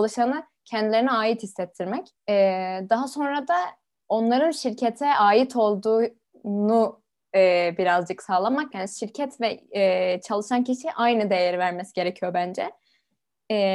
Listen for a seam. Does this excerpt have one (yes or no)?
yes